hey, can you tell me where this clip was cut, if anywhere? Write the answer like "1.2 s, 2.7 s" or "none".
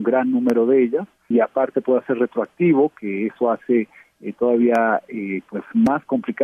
1.3 s

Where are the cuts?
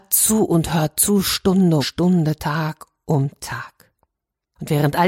1.8 s

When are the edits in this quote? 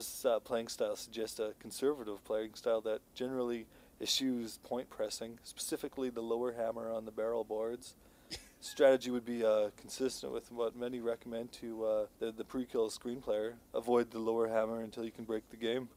12.1 s, 13.7 s

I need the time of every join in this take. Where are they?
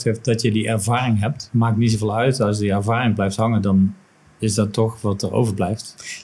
none

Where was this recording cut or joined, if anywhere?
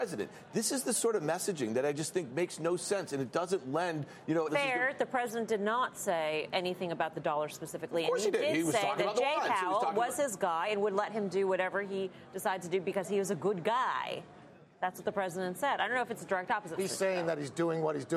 4.5 s, 16.8 s

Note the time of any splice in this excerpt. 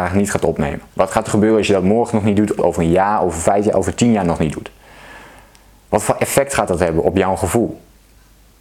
2.6 s

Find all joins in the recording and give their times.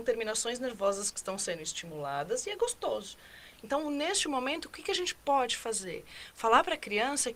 none

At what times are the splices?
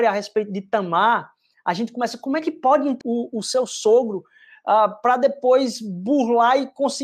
3.0 s

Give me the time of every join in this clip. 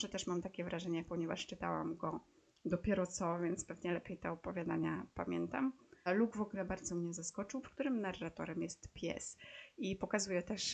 6.1 s, 7.6 s

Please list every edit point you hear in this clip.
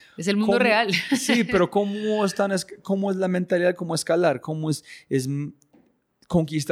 none

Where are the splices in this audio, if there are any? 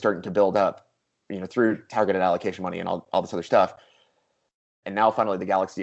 4.8 s

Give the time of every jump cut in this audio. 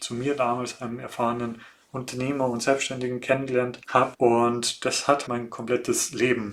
4.1 s, 5.3 s

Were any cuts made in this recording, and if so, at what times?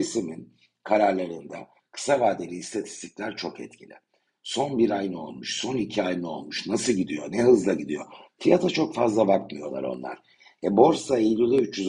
none

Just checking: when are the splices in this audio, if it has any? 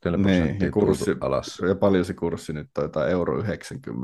none

